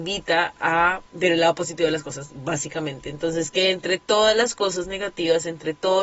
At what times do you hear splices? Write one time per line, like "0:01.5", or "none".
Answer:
0:01.1